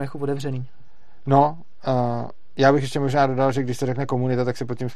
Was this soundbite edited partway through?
no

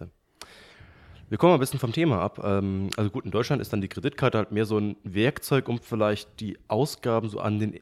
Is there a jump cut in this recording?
no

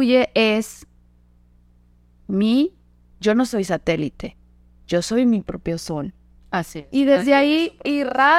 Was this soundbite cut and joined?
no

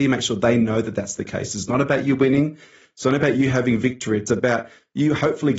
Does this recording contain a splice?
no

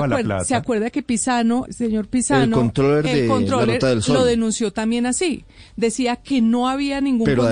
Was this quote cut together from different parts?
yes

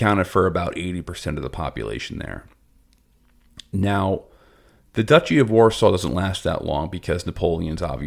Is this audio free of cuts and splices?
yes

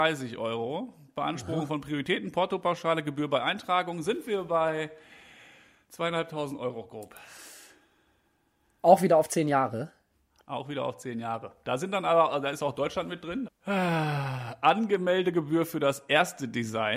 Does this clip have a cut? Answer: yes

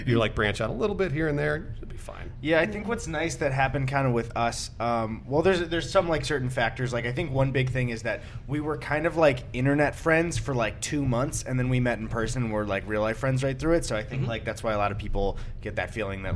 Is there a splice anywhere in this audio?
no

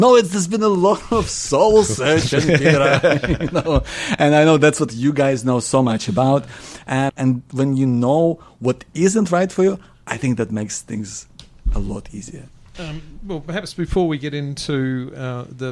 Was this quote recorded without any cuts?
no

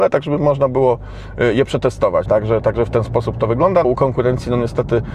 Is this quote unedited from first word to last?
no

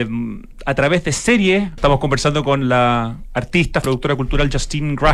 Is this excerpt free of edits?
no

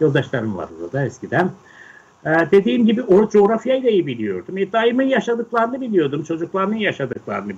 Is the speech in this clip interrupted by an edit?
no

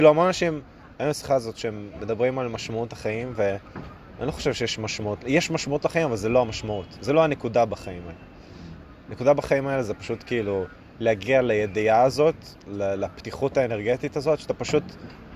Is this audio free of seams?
yes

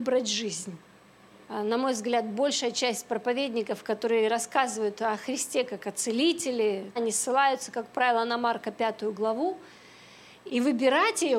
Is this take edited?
yes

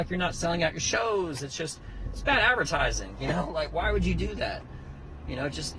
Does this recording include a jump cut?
no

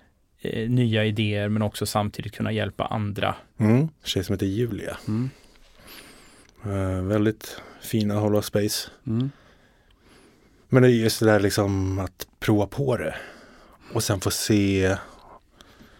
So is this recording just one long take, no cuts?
no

